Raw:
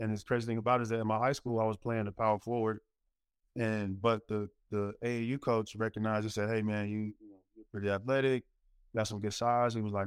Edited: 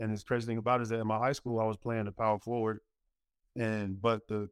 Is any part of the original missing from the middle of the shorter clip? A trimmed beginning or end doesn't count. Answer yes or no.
no